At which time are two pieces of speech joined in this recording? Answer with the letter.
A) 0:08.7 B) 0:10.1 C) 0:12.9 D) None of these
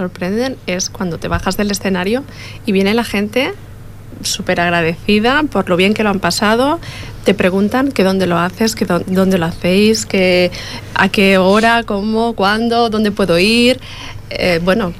D